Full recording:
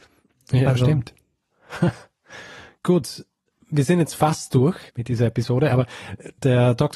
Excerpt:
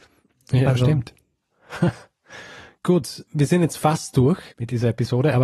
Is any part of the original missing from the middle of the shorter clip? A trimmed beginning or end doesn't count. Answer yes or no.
yes